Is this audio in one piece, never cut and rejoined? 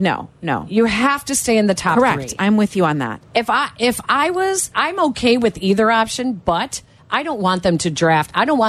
no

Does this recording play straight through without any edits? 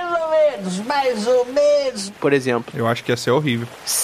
no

